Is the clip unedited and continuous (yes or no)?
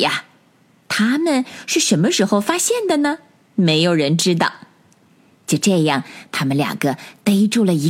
yes